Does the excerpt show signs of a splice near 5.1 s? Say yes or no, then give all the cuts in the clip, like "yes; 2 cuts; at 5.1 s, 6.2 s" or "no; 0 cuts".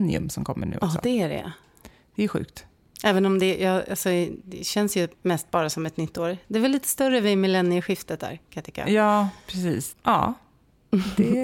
yes; 2 cuts; at 5.1 s, 9.9 s